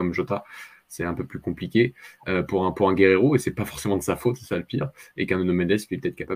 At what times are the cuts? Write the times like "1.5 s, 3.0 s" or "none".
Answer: none

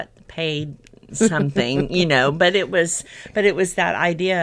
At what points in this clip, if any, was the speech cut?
none

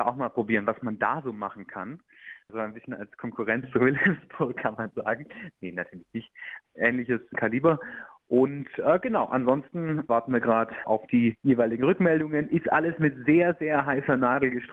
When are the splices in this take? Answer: none

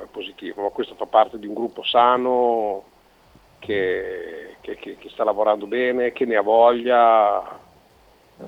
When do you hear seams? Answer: none

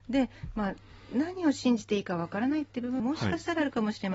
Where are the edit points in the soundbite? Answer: 3.0 s

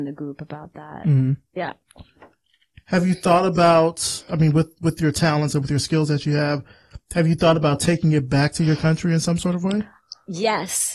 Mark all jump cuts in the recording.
none

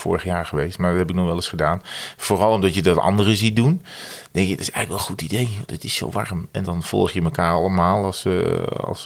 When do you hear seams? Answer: 6.6 s

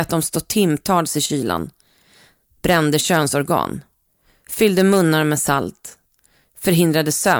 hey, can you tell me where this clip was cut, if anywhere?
none

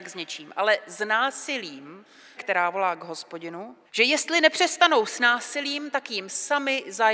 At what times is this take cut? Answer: 2.4 s, 3.8 s

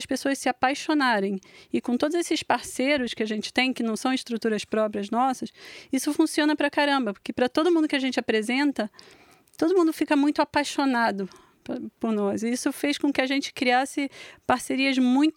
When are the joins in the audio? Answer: none

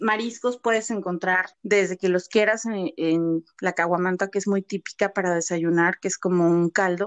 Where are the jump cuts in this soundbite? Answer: 1.5 s

